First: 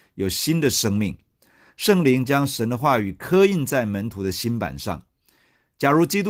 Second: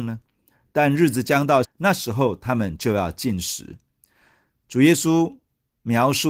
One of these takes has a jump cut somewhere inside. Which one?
second; 1 cut; at 1.6 s

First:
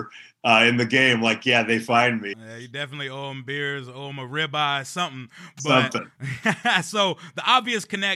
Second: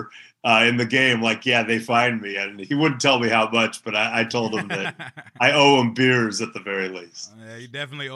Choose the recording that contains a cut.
first; 1 cut; at 2.3 s

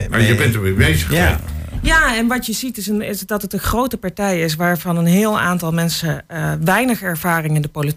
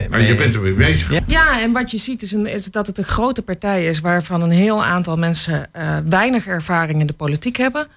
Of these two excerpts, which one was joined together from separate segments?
second; 1 cut; at 1.2 s

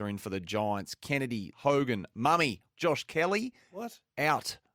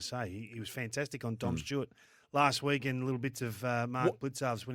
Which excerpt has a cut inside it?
first; 2 cuts; at 1.5 s, 2.7 s

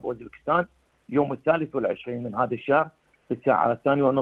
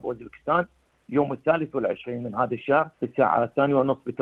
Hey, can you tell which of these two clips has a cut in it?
second; 1 cut; at 2.9 s

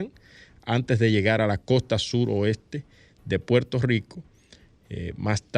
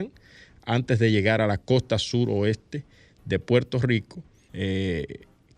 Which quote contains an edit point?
second; 1 cut; at 4.5 s

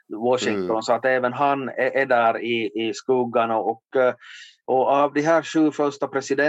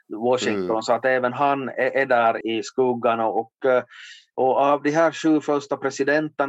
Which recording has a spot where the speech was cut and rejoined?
second; 1 cut; at 2.4 s

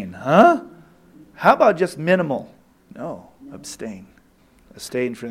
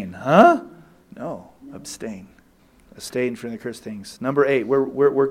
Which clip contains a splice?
second; 1 cut; at 1.0 s

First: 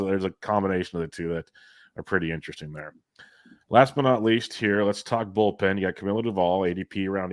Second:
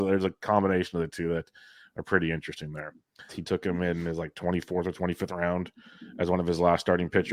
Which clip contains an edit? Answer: second; 1 cut; at 3.3 s

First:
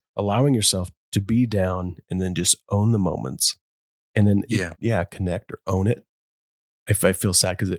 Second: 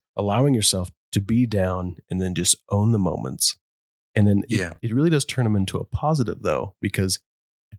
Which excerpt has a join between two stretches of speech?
first; 1 cut; at 4.8 s

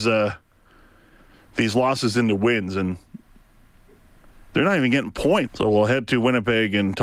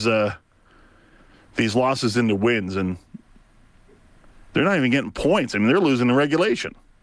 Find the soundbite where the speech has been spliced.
first; 1 cut; at 5.5 s

